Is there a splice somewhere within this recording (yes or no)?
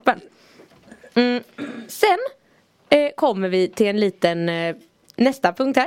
no